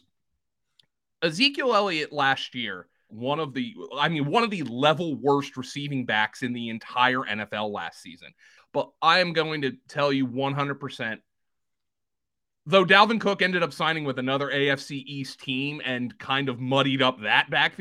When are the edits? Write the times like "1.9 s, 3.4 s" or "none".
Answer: 3.1 s, 8.6 s